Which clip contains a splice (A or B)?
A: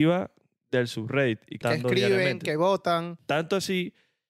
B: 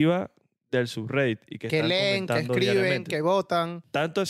A